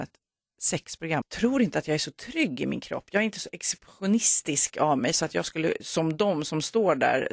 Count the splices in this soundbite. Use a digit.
1